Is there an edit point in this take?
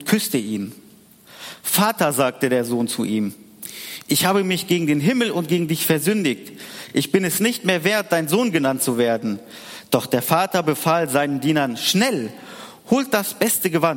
no; 0 cuts

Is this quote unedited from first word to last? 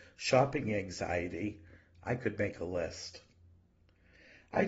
yes; 0 cuts

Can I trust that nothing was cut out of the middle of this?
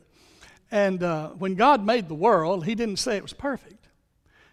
yes; 0 cuts

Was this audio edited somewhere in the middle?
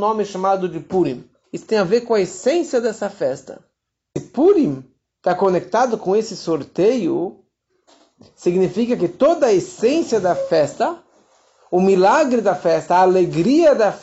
yes; 1 cut; at 1.4 s

